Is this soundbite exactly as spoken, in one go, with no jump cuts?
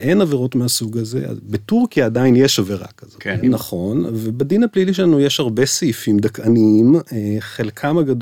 no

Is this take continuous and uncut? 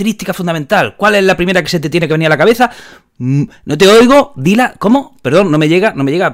yes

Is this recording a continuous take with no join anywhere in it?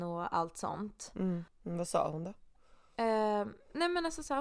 no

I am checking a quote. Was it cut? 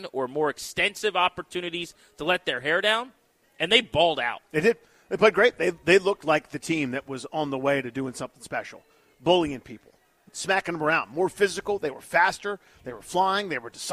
no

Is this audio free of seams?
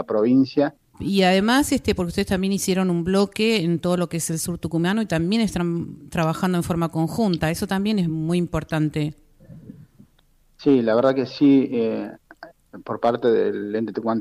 no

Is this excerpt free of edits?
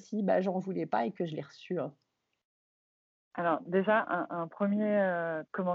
yes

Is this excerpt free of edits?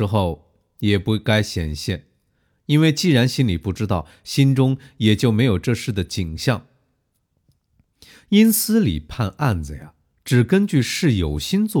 yes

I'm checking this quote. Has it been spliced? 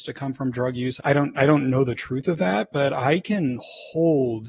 yes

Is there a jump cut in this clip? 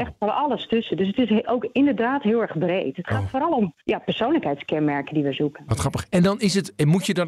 yes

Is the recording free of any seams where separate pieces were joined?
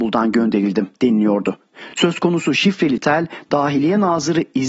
yes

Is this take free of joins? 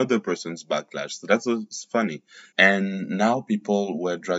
no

